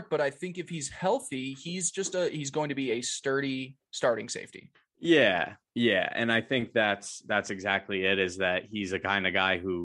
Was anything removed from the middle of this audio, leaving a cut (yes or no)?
no